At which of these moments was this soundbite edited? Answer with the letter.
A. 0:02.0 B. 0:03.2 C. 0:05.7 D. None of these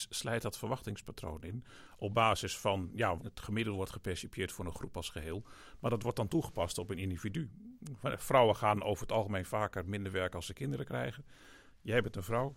B